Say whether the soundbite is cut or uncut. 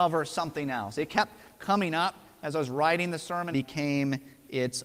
cut